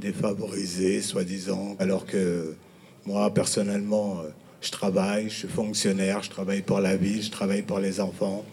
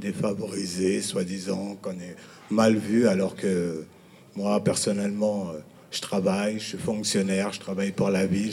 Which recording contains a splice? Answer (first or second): first